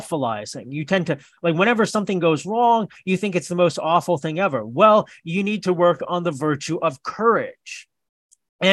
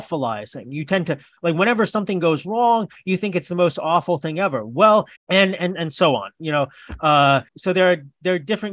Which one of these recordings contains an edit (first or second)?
second